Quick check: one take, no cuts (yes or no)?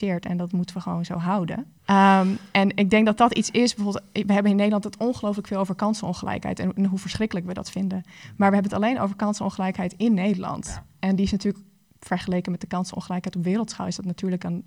no